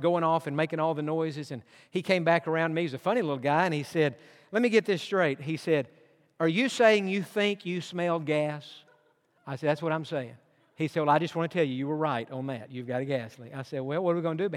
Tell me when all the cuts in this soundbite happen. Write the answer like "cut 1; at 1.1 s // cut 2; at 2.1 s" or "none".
none